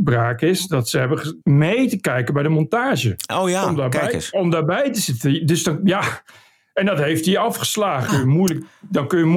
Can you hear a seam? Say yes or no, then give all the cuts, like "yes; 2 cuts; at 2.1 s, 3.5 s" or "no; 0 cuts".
yes; 2 cuts; at 1.4 s, 8.1 s